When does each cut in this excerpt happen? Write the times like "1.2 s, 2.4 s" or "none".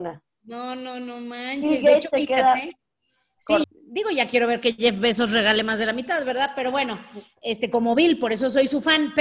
3.6 s